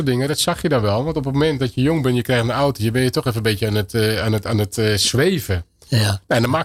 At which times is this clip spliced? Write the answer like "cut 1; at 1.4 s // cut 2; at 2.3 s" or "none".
none